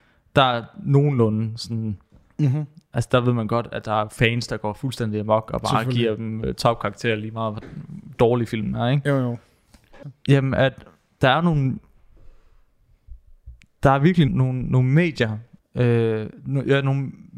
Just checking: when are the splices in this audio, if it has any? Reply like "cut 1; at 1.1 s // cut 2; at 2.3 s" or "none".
cut 1; at 10.0 s // cut 2; at 14.3 s // cut 3; at 15.6 s